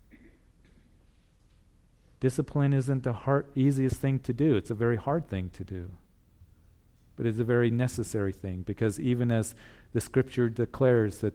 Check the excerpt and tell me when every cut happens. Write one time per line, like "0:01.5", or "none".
none